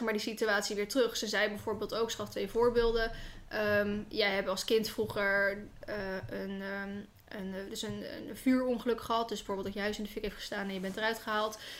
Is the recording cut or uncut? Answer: uncut